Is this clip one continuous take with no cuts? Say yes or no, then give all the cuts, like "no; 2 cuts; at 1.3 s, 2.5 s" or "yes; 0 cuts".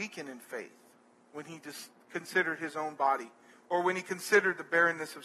no; 1 cut; at 3.5 s